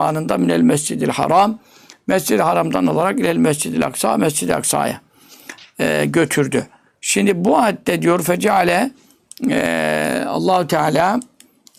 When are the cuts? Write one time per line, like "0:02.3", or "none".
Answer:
none